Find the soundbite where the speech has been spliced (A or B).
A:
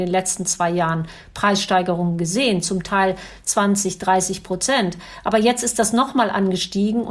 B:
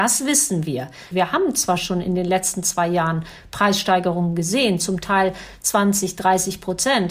B